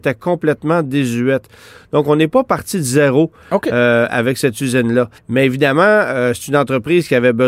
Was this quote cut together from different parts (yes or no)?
yes